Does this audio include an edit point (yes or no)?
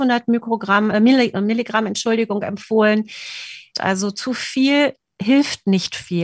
yes